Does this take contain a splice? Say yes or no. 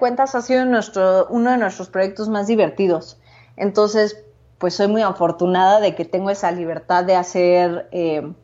no